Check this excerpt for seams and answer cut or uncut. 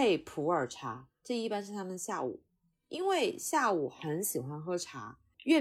uncut